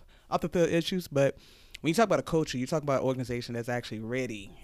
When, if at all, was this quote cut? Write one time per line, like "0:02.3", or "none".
none